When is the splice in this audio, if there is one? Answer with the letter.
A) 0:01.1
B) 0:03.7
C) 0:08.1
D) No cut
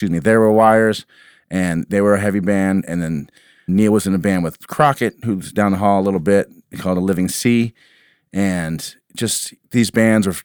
B